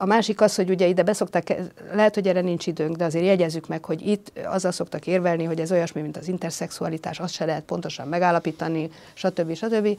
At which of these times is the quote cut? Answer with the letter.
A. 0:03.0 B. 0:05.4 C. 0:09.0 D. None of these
D